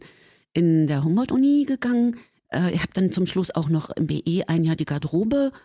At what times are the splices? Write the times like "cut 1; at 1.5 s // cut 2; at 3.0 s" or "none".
cut 1; at 2.4 s